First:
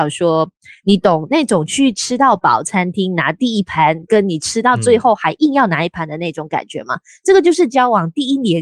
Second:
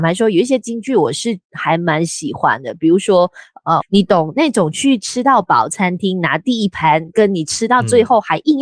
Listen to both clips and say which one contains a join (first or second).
second